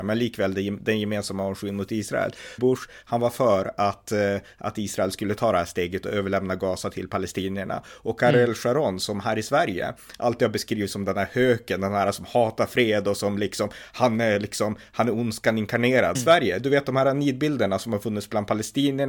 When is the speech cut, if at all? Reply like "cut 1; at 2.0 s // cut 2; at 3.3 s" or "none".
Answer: cut 1; at 2.6 s // cut 2; at 16.1 s